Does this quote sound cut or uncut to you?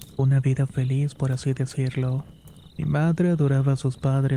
cut